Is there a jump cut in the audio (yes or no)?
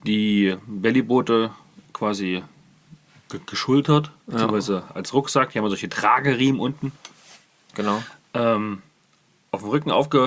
yes